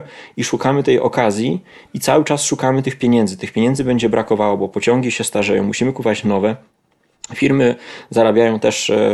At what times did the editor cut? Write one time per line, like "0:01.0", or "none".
none

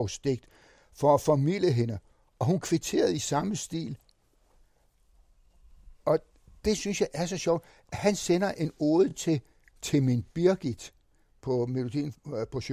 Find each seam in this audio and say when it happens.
none

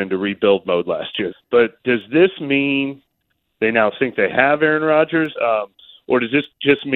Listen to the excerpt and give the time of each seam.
0:01.3
0:05.3

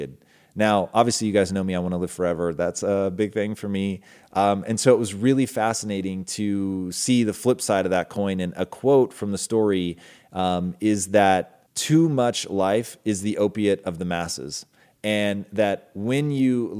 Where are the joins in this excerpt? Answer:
0:11.7

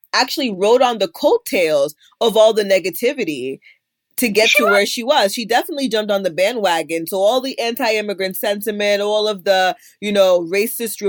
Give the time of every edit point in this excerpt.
none

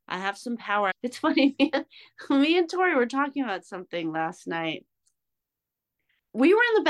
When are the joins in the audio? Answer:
0:00.9

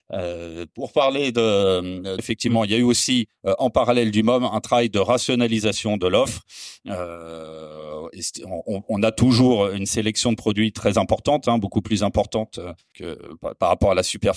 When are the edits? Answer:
0:02.2
0:12.9

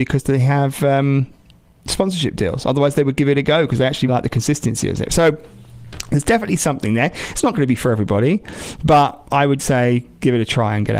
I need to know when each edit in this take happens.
0:04.1
0:09.6

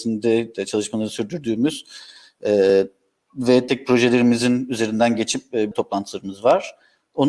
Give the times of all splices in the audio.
0:03.7
0:05.7

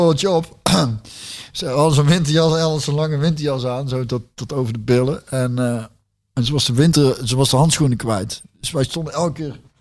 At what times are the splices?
none

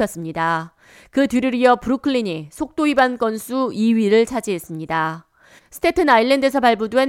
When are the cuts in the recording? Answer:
0:05.6

